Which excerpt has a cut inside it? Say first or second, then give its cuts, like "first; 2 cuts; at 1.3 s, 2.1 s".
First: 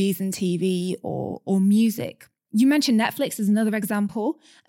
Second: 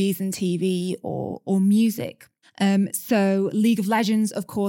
second; 1 cut; at 2.4 s